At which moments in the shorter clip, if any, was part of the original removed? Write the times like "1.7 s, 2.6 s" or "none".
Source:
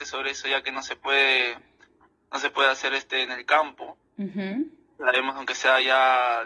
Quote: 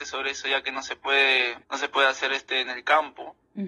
1.6 s